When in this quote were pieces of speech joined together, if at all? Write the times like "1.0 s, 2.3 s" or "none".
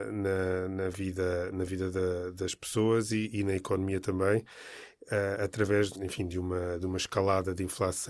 5.9 s